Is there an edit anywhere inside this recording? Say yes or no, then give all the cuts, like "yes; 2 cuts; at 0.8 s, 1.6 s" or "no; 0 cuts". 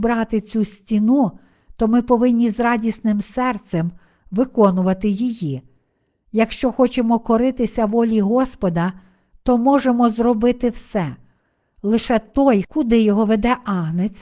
yes; 1 cut; at 12.6 s